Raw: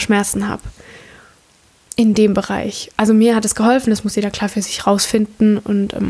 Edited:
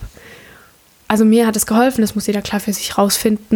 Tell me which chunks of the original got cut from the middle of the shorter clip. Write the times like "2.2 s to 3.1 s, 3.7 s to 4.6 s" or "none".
1.7 s to 2.9 s